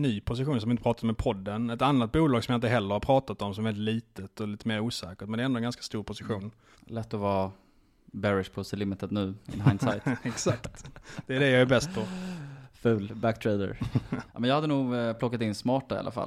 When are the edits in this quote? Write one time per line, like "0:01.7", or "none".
0:06.7
0:14.3